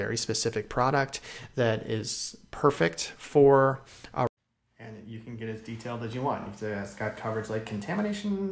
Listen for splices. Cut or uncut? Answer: uncut